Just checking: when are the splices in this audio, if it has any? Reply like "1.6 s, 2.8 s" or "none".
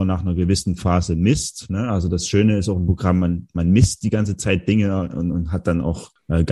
none

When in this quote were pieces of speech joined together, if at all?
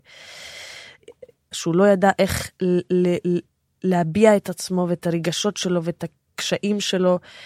1.5 s

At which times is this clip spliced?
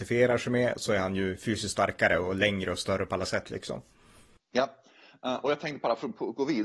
none

